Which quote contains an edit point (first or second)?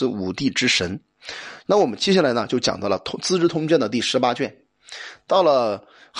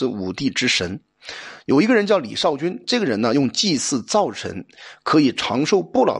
first